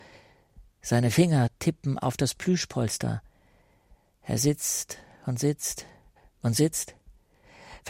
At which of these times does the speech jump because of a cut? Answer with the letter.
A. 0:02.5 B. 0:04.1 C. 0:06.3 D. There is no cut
D